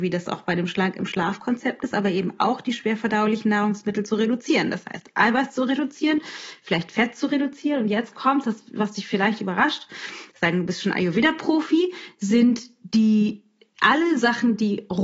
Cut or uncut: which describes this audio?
uncut